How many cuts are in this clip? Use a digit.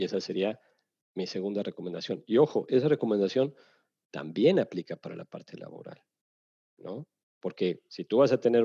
0